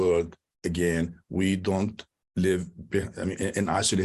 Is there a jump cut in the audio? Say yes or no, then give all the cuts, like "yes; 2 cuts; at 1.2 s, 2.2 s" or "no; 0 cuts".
no; 0 cuts